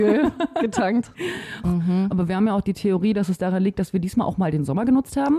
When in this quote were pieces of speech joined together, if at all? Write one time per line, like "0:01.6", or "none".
0:01.6

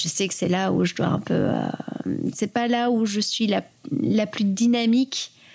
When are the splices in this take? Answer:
none

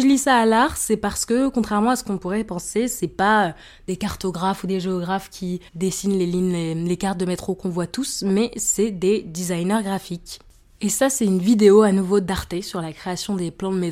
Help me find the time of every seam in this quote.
0:05.7

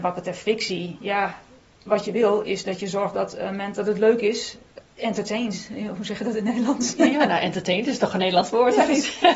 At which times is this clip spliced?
0:01.9
0:04.8

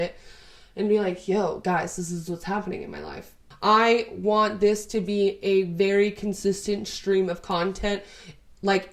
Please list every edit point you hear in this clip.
0:03.5

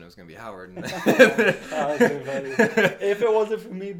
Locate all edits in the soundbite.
none

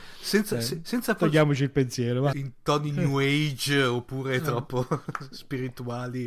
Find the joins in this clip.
0:02.3

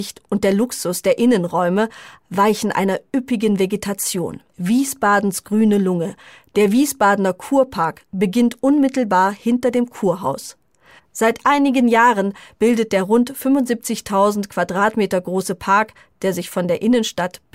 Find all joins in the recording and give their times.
0:04.5
0:11.0

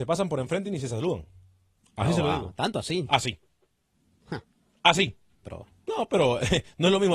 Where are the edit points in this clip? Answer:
0:05.4

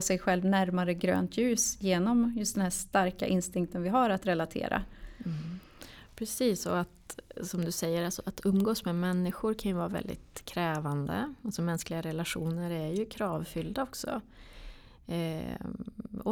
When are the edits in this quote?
none

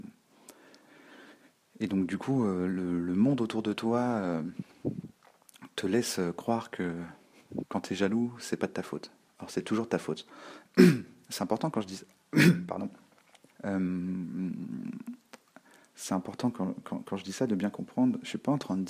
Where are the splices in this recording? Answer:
0:13.5

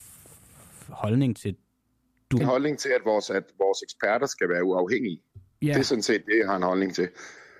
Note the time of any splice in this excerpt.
0:02.4

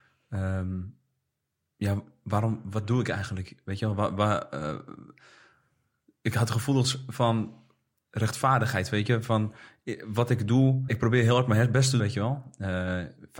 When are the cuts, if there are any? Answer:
0:10.9
0:12.0

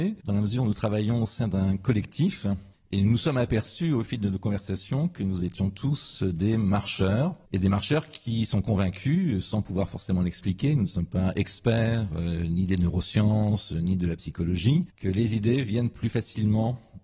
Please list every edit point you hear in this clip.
0:07.4

